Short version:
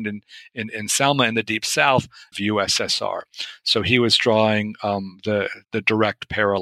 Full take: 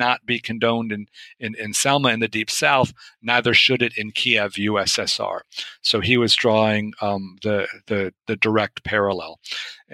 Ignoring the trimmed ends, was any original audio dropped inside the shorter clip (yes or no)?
yes